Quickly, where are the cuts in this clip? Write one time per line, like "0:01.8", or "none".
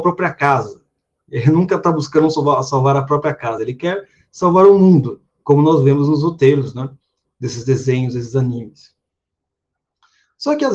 none

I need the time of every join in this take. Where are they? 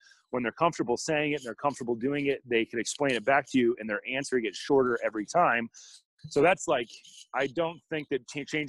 0:06.2

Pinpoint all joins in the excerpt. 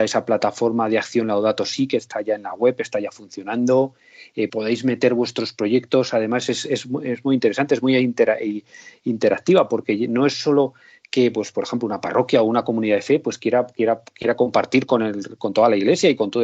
0:04.5

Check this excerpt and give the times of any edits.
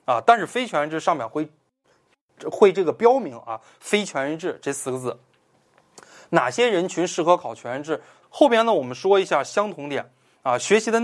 0:08.2

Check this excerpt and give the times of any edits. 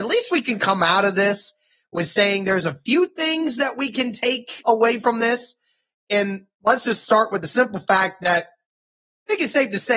0:04.6

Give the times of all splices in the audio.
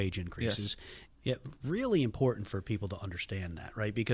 0:01.1

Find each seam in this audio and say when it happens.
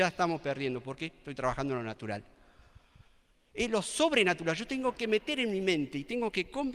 none

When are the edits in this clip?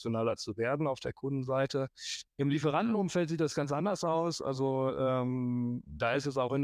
0:02.3

